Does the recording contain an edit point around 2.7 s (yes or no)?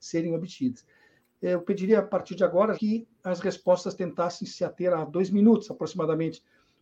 yes